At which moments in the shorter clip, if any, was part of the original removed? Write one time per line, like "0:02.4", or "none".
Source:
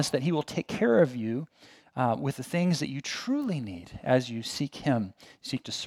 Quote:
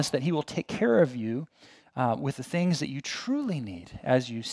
none